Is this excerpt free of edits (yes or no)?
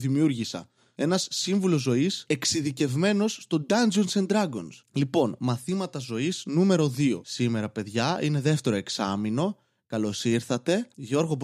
yes